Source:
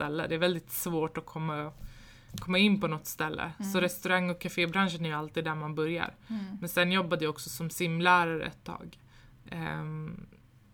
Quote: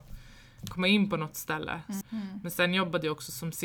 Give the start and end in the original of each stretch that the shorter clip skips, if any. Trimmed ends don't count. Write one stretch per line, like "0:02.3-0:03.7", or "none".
0:03.7-0:06.2